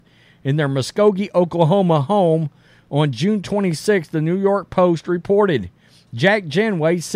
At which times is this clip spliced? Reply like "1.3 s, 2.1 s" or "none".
none